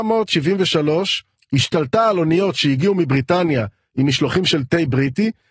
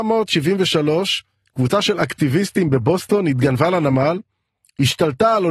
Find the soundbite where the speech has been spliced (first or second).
first